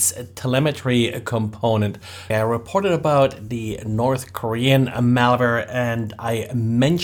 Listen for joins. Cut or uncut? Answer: cut